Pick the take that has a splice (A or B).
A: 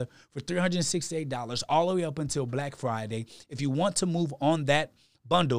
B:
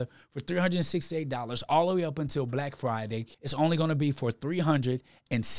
B